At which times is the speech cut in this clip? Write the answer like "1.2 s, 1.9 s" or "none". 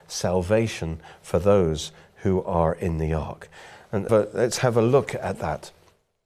4.1 s